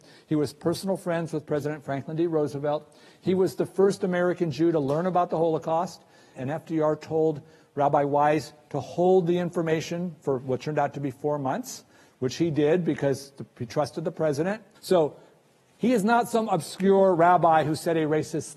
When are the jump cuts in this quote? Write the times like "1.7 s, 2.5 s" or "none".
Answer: 6.4 s, 14.8 s